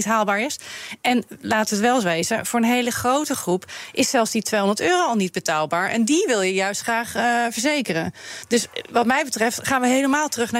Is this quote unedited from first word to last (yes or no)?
yes